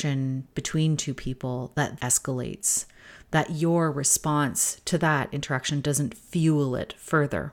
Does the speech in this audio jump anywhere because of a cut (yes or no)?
yes